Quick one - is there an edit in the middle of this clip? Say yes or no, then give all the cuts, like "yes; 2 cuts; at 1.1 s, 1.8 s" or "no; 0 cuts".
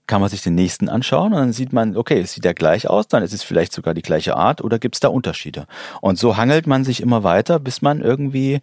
no; 0 cuts